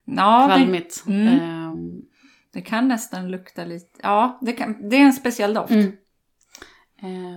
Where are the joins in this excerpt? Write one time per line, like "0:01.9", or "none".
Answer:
none